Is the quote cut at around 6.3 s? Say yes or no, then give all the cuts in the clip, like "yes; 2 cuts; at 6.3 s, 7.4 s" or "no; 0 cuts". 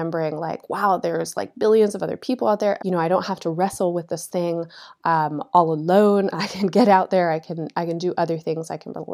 no; 1 cut; at 2.8 s